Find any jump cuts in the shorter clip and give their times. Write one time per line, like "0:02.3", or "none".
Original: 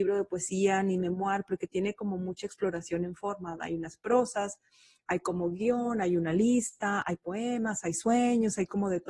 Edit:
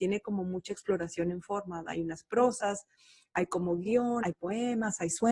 0:04.2